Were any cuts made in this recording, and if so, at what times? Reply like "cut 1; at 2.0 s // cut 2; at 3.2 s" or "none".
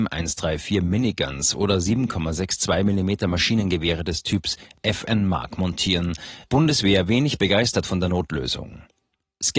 cut 1; at 6.4 s